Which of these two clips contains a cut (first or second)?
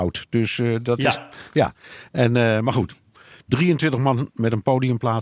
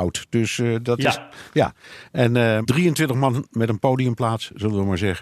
second